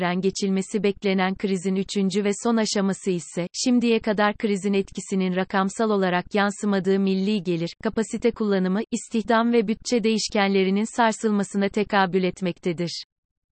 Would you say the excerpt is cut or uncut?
uncut